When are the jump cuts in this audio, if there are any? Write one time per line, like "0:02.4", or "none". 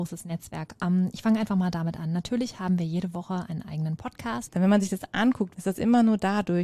0:04.5
0:05.5